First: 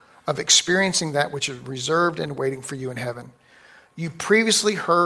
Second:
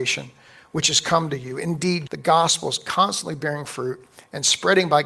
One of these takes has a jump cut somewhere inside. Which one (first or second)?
second